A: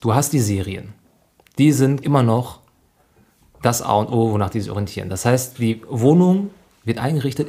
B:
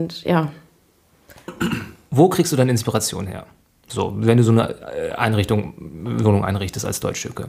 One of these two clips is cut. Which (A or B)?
A